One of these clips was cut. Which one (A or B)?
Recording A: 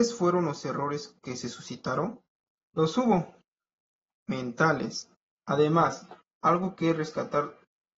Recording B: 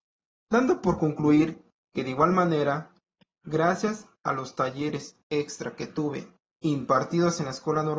A